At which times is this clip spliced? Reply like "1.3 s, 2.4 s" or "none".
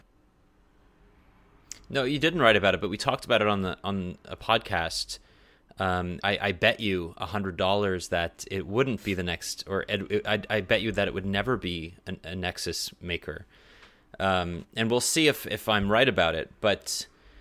6.2 s